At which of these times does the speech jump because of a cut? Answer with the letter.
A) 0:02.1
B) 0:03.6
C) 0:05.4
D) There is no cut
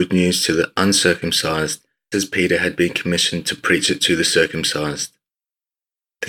A